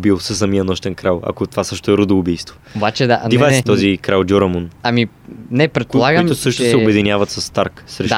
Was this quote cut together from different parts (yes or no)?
yes